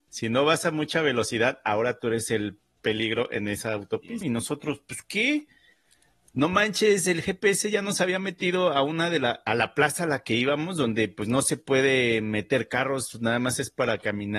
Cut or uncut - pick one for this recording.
cut